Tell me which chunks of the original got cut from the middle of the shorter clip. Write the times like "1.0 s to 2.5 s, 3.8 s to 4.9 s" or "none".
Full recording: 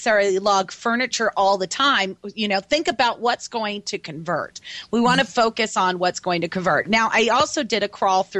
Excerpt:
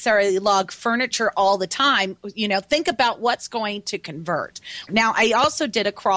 4.9 s to 6.8 s